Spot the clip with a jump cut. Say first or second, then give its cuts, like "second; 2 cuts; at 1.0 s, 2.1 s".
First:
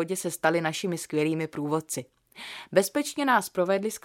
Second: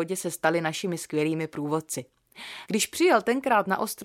second; 1 cut; at 2.7 s